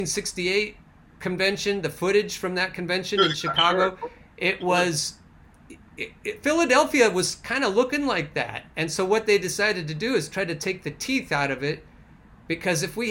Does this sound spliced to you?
no; 0 cuts

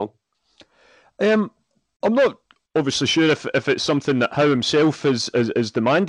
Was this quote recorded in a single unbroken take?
yes; 0 cuts

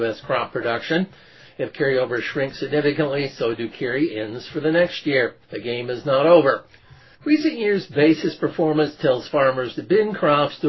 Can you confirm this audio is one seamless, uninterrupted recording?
no; 1 cut; at 5.4 s

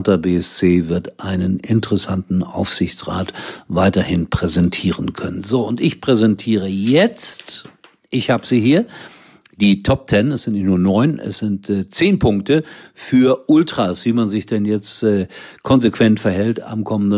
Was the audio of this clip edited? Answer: no; 0 cuts

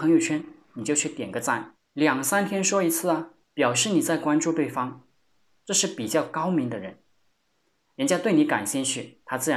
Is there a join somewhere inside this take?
yes; 2 cuts; at 1.8 s, 3.4 s

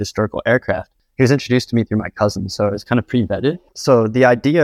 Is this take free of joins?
no; 1 cut; at 3.7 s

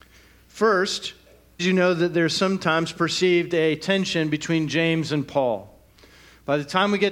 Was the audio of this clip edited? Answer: yes; 1 cut; at 1.6 s

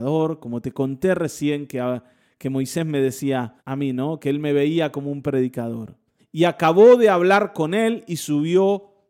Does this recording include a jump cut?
yes; 2 cuts; at 3.6 s, 6.2 s

